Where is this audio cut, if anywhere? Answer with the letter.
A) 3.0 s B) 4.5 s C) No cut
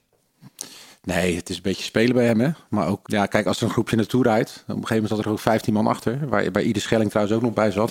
A